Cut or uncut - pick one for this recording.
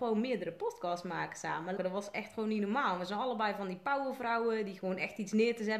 cut